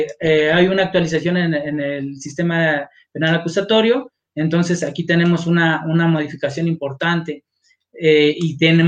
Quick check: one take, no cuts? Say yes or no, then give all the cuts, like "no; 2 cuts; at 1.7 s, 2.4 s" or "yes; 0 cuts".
yes; 0 cuts